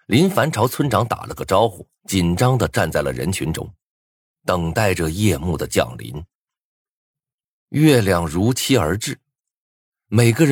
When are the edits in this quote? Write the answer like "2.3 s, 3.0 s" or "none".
2.0 s